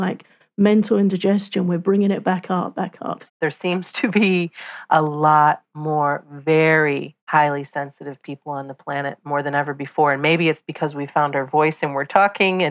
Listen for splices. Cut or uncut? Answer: cut